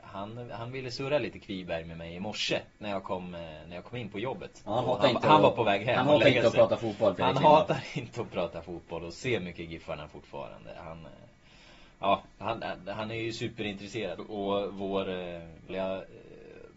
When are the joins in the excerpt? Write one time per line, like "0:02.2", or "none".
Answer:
0:14.2
0:15.7